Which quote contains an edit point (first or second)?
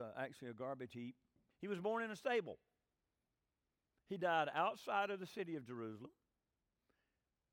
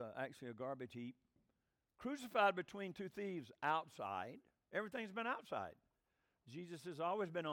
first